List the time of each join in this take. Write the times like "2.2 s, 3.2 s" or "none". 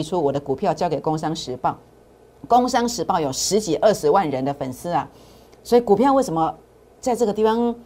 none

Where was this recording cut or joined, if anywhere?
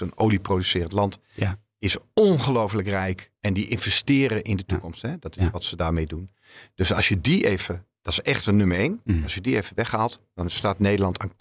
none

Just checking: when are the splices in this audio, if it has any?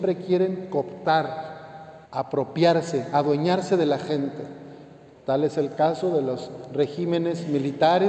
2.0 s, 5.1 s

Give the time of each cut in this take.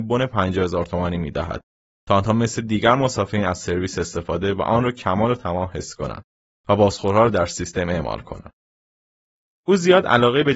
none

